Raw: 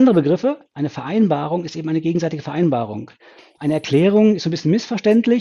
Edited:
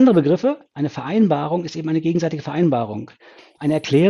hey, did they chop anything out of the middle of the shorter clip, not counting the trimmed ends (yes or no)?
no